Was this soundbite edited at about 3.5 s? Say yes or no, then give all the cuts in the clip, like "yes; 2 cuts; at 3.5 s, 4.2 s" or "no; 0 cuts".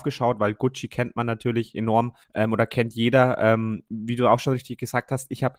no; 1 cut; at 2.2 s